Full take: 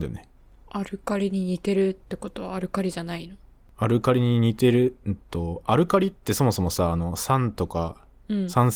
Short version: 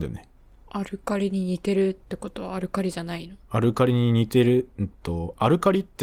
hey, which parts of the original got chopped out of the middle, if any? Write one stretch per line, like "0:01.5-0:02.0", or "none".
0:03.4-0:03.7